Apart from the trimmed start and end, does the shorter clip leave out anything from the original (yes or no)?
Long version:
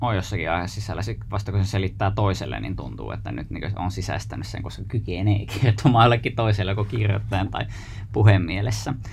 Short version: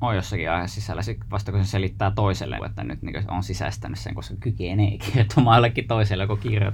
yes